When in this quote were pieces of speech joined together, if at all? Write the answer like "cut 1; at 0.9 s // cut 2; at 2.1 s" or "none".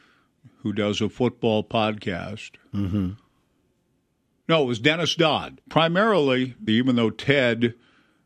cut 1; at 5.6 s // cut 2; at 6.7 s